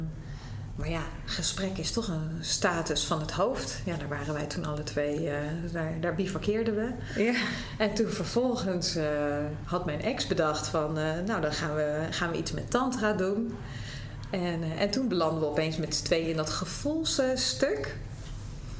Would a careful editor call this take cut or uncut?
uncut